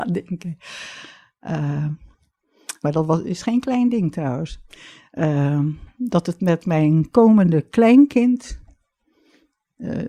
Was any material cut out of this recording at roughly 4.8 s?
no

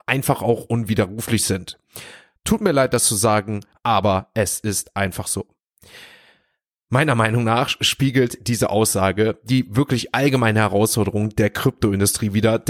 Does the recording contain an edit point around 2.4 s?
yes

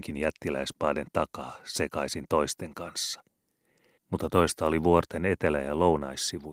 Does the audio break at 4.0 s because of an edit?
yes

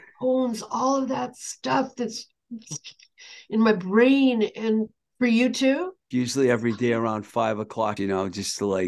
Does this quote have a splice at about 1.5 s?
no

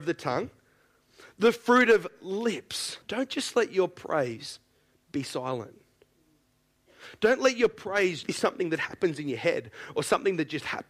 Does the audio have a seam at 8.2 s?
yes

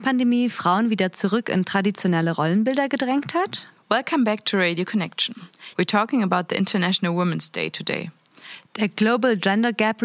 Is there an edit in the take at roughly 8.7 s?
yes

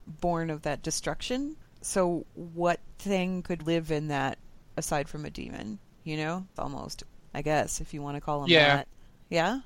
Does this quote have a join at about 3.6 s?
yes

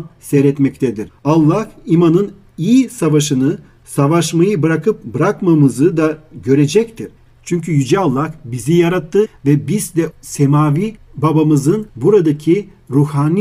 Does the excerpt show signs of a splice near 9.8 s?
no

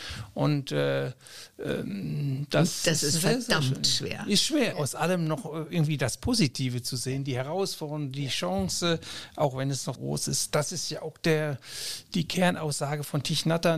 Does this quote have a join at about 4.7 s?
yes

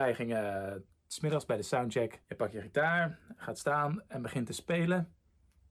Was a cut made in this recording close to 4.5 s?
no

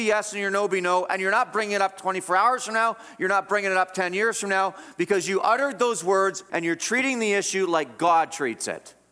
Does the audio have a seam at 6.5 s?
yes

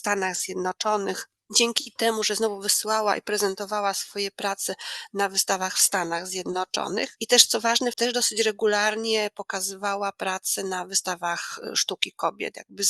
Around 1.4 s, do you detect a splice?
no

